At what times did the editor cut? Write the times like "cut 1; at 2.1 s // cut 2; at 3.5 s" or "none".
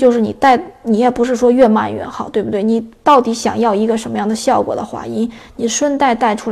none